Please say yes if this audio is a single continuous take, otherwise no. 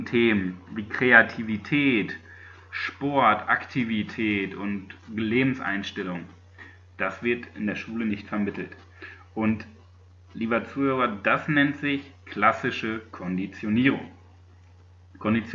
yes